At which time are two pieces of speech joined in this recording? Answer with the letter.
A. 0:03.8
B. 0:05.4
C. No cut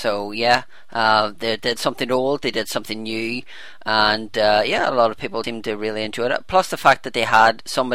B